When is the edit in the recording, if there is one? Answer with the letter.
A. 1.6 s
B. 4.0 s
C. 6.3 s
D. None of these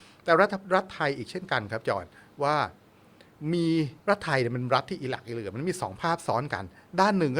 B